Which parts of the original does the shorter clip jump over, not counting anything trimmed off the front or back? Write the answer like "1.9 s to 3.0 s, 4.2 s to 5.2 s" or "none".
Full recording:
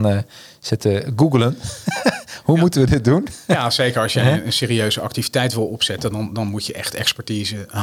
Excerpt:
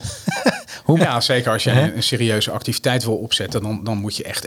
2.6 s to 3.5 s